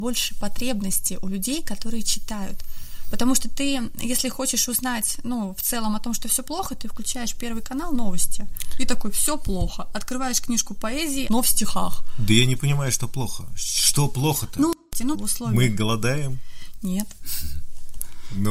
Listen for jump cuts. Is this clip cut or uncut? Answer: cut